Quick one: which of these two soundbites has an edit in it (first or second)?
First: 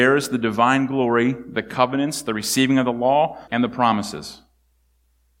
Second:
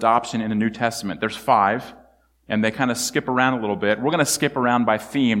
first